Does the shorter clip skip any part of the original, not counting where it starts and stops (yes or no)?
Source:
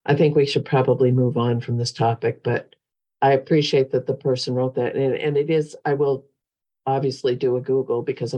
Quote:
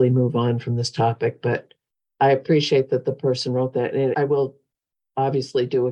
yes